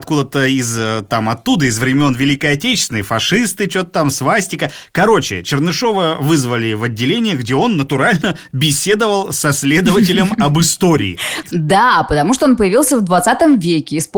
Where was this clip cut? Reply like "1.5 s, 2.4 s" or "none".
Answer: 11.4 s